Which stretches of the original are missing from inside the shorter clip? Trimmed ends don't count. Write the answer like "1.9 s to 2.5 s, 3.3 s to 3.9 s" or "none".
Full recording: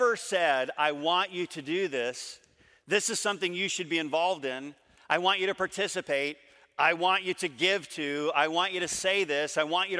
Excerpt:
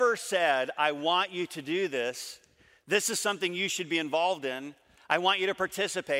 none